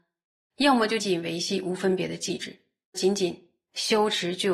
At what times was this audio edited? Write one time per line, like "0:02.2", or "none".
0:01.0
0:02.9